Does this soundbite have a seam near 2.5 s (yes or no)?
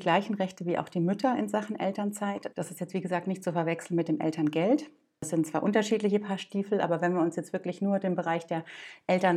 yes